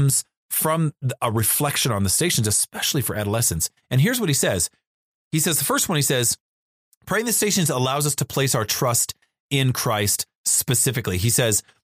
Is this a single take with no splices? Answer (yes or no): yes